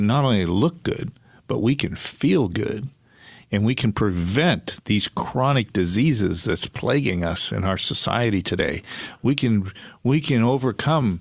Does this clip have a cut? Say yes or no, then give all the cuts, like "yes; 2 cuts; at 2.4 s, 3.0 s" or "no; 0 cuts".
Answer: no; 0 cuts